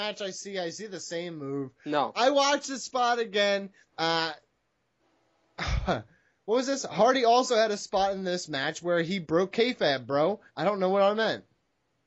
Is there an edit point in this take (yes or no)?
yes